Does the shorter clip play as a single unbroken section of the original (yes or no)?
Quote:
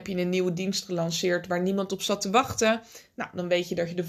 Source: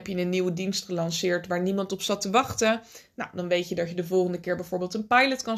yes